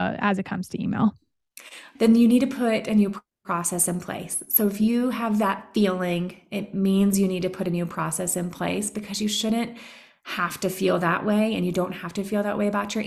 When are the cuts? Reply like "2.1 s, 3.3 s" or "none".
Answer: 1.9 s